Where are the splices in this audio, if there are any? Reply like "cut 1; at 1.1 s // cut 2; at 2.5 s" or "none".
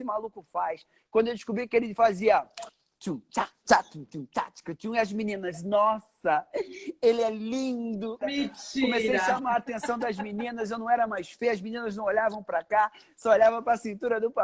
cut 1; at 8.2 s